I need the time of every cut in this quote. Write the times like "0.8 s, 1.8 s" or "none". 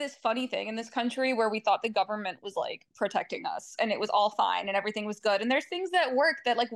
none